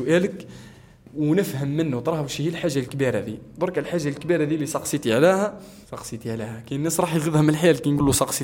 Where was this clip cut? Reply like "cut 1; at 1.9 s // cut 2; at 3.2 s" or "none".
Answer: cut 1; at 5.8 s